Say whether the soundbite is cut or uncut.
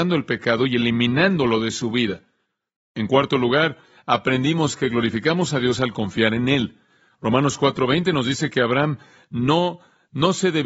uncut